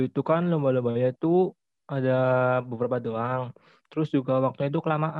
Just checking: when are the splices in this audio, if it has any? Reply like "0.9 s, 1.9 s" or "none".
none